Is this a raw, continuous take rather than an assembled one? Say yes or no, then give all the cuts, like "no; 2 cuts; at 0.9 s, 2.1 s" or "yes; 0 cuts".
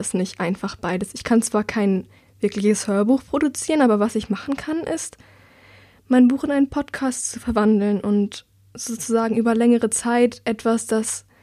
yes; 0 cuts